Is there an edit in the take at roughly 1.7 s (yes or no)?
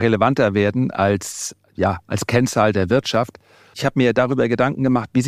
no